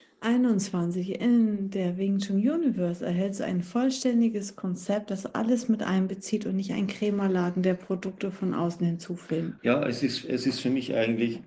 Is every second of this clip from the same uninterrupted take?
no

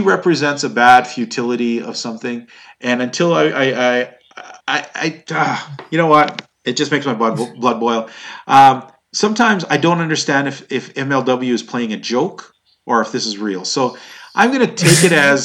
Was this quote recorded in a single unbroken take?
yes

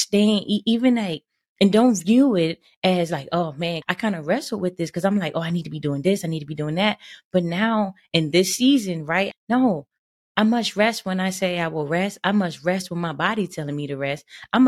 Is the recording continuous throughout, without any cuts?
no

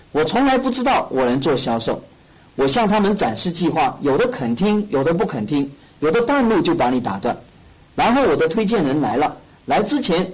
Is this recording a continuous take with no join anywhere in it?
yes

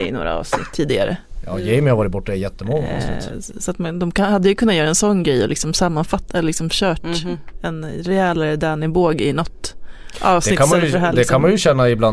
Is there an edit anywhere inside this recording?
no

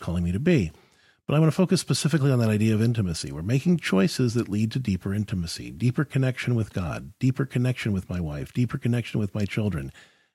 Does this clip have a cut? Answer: no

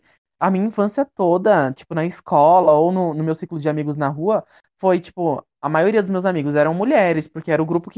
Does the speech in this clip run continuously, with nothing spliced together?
yes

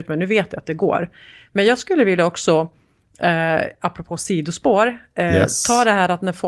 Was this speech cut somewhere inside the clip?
no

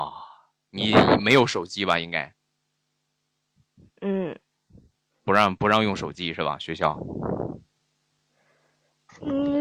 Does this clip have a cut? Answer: no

